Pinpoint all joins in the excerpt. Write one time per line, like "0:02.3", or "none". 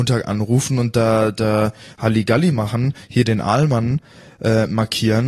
none